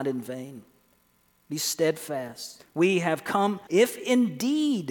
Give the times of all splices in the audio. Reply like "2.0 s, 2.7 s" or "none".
2.6 s, 3.7 s